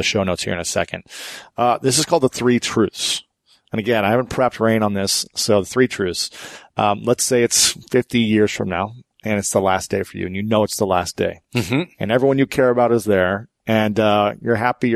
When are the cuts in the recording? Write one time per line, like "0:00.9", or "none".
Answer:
none

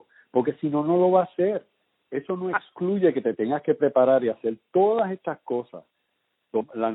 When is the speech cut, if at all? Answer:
0:02.0

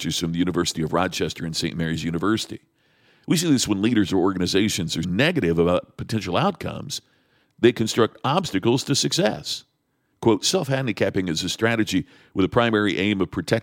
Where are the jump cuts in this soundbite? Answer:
0:05.0
0:10.1

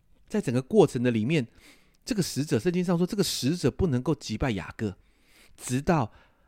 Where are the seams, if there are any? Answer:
none

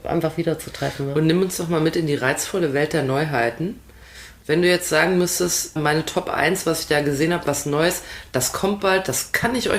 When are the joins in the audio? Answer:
0:05.8

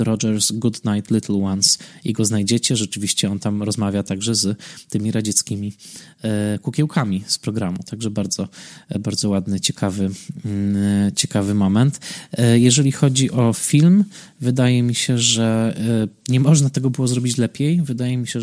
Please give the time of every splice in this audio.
none

